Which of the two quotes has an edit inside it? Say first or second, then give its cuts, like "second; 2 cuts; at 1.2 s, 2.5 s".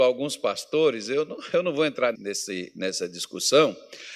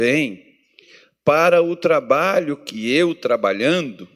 first; 1 cut; at 2.1 s